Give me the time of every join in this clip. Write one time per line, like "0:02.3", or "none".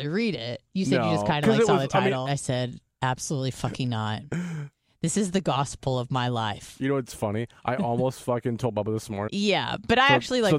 0:02.3
0:09.3